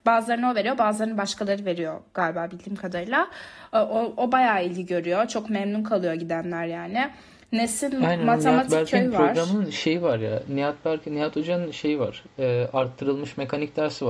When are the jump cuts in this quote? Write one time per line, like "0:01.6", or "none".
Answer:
none

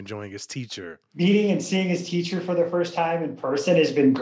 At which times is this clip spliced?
none

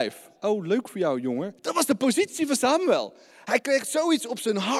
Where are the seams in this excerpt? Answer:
0:01.6

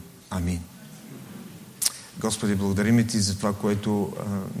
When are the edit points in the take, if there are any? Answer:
none

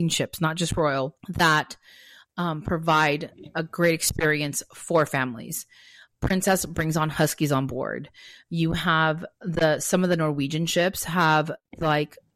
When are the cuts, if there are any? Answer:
0:01.2

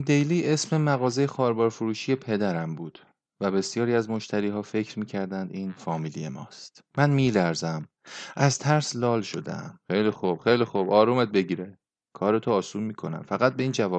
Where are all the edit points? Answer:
0:06.9
0:09.8

